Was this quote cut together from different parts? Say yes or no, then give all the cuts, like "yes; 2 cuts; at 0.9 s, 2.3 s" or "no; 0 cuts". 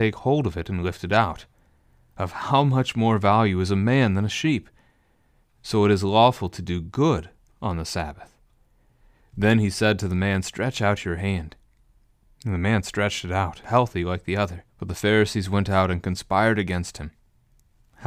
yes; 2 cuts; at 13.6 s, 14.7 s